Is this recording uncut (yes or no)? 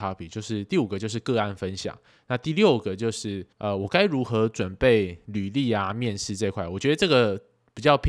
no